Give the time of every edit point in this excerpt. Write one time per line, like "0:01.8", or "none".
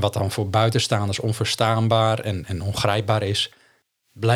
none